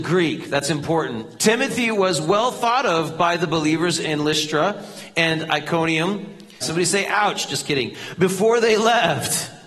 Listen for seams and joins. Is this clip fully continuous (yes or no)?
no